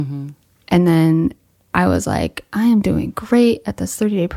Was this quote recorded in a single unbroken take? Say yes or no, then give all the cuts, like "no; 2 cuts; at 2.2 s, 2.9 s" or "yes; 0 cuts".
yes; 0 cuts